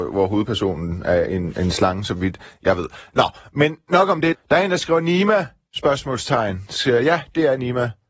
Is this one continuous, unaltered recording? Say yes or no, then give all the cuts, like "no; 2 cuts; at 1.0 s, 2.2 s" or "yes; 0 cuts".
yes; 0 cuts